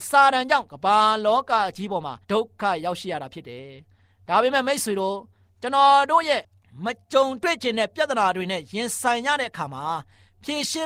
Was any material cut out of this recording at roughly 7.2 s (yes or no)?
no